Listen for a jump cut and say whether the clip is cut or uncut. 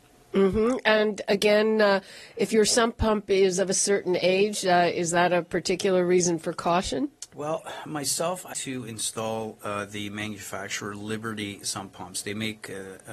cut